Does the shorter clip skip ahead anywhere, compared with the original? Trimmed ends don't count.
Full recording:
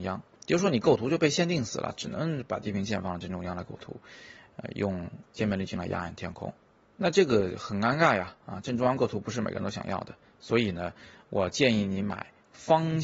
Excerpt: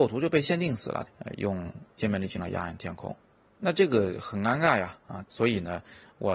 yes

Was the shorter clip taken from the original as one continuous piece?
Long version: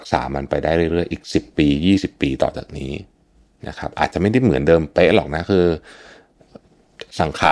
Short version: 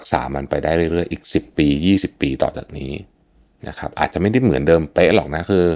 yes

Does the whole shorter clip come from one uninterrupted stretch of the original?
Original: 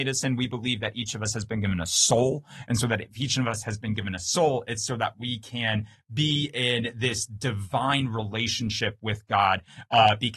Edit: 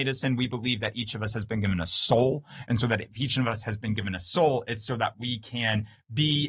yes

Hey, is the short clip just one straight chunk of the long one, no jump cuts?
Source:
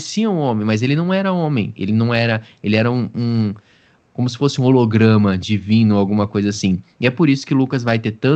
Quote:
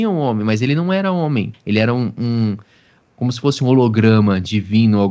no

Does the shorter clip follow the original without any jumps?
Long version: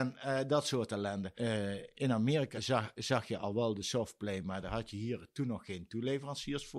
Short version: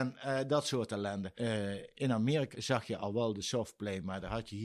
no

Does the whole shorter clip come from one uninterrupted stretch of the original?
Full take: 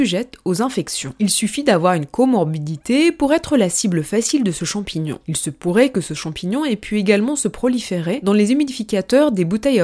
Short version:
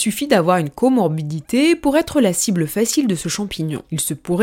yes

